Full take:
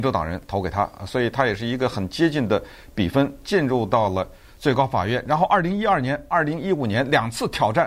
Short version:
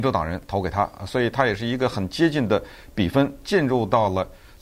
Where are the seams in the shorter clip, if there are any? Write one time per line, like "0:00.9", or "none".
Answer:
none